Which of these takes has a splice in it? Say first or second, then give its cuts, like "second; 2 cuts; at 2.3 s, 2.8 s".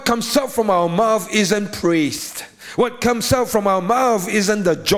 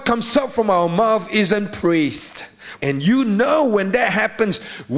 second; 1 cut; at 2.8 s